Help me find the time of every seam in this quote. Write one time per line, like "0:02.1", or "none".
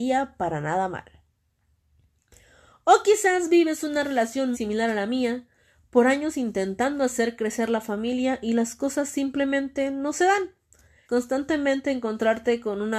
0:04.5
0:11.1